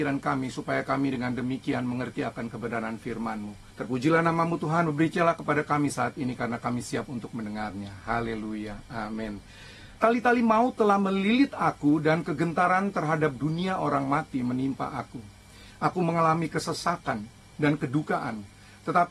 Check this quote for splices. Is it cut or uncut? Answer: cut